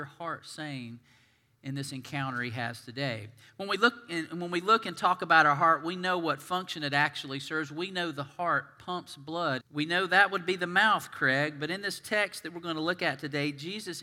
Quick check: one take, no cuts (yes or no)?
no